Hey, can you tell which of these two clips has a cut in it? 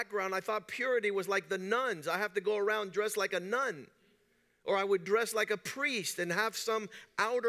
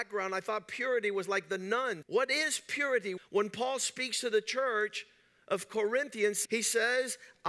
second; 3 cuts; at 2.0 s, 3.2 s, 6.4 s

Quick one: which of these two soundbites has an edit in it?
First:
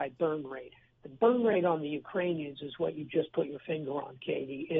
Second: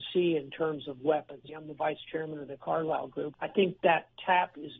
second; 2 cuts; at 1.5 s, 3.3 s

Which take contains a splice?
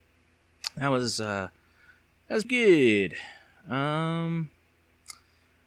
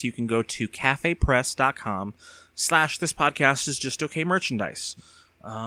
first; 1 cut; at 2.4 s

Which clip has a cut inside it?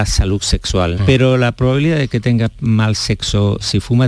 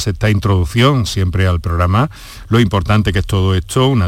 first; 1 cut; at 1.0 s

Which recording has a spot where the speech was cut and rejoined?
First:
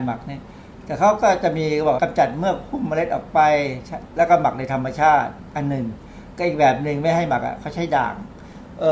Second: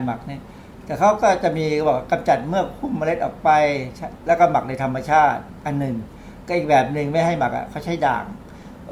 first; 1 cut; at 2.0 s

